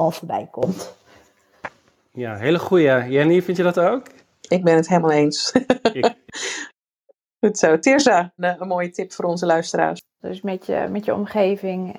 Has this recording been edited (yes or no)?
yes